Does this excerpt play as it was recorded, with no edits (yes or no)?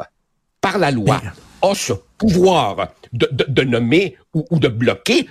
yes